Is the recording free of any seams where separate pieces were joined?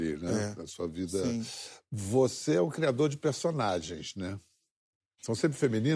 yes; 0 cuts

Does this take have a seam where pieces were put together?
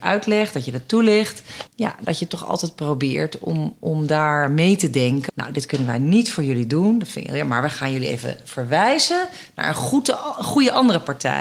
yes; 2 cuts; at 1.7 s, 5.3 s

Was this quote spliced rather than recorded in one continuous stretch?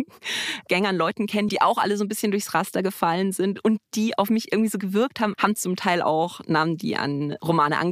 yes; 2 cuts; at 1.5 s, 5.3 s

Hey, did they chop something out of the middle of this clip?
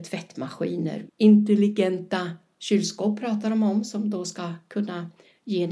yes; 1 cut; at 1.1 s

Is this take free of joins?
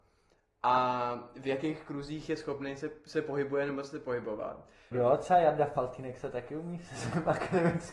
no; 1 cut; at 4.9 s

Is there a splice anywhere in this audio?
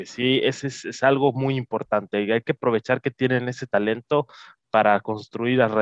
no; 0 cuts

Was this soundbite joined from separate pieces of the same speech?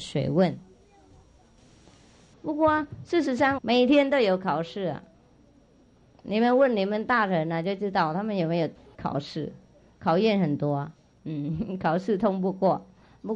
yes; 3 cuts; at 2.3 s, 3.6 s, 11.1 s

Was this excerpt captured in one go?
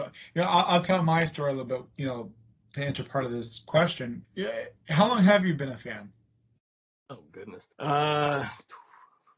no; 2 cuts; at 4.2 s, 7.7 s

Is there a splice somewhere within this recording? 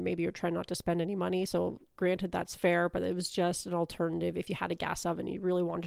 no; 0 cuts

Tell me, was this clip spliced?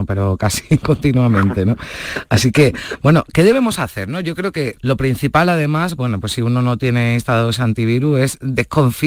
yes; 1 cut; at 4.7 s

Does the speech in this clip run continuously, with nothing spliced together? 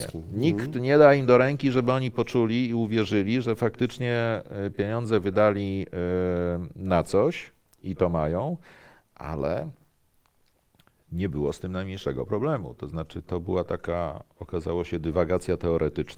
yes; 0 cuts

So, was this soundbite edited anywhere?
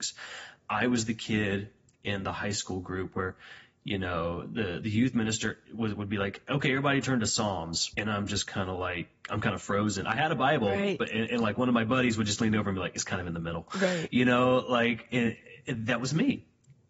no; 0 cuts

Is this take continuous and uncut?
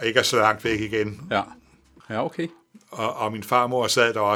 no; 1 cut; at 2.0 s

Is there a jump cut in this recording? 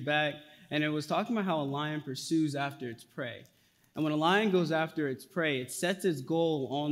no; 0 cuts

